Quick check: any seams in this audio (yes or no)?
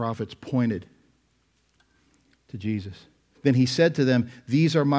yes